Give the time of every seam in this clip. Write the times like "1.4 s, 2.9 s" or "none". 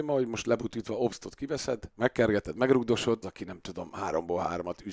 1.9 s, 3.2 s